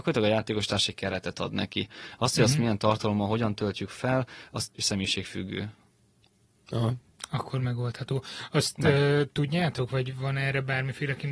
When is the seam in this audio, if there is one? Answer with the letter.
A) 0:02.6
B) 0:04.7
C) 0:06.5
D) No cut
B